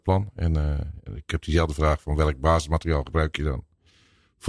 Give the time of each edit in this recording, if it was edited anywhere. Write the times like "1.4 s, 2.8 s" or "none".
none